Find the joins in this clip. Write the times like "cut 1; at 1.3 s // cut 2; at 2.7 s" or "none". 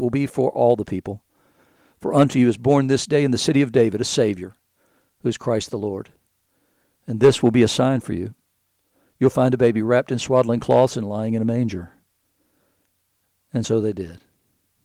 none